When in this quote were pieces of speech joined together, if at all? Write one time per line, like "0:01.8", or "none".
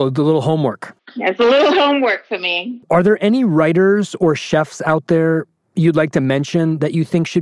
none

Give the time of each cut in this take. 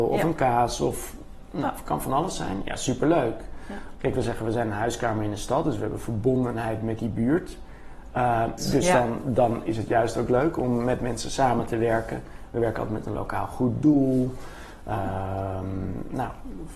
0:04.0
0:08.6

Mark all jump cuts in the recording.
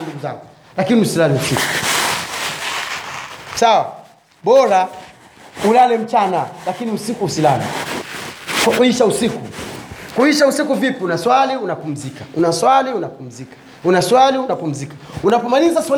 none

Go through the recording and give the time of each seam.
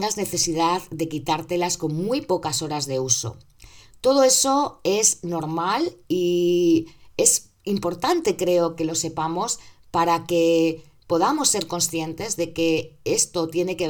none

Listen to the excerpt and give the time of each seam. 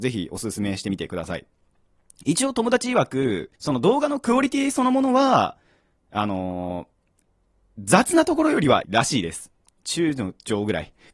0:03.6
0:08.8

